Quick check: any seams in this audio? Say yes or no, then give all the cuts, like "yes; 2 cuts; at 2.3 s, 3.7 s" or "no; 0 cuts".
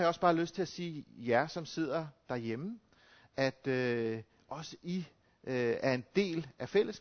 no; 0 cuts